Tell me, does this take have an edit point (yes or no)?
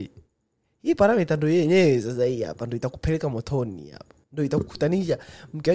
yes